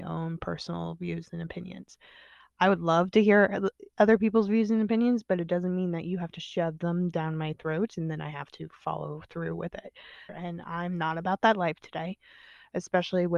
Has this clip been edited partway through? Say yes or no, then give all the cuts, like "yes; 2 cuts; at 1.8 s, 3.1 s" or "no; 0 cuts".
yes; 1 cut; at 10.3 s